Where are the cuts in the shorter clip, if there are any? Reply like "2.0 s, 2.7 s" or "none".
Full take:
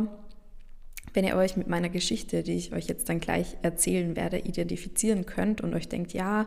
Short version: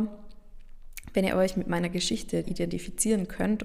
2.4 s